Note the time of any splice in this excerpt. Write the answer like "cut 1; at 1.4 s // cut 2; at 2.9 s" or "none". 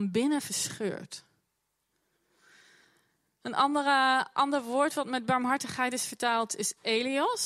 none